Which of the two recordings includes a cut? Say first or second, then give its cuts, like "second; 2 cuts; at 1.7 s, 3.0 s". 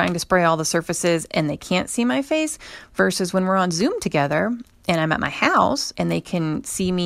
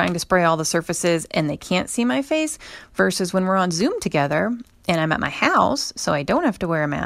first; 1 cut; at 5.9 s